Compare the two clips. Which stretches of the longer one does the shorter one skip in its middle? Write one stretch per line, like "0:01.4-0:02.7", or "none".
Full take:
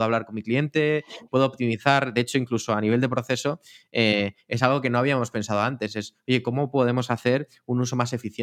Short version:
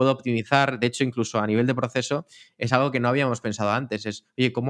0:03.9-0:04.4